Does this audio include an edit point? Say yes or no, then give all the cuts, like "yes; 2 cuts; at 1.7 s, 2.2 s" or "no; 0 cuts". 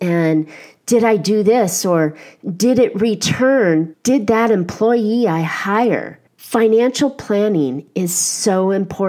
yes; 2 cuts; at 3.9 s, 6.3 s